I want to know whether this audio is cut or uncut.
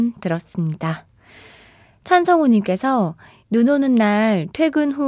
uncut